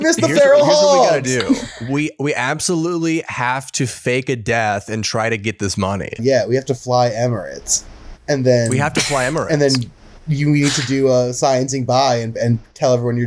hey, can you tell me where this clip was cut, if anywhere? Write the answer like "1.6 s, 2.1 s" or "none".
6.2 s